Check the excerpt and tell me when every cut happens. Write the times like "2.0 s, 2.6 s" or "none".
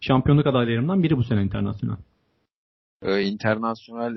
none